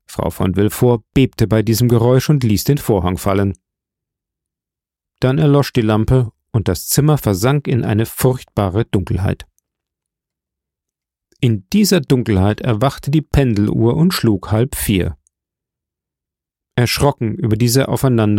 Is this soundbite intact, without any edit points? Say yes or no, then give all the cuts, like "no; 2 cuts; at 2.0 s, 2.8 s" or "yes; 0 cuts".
yes; 0 cuts